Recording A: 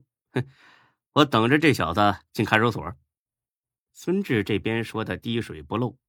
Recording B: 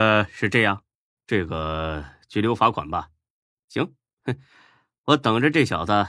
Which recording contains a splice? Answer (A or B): B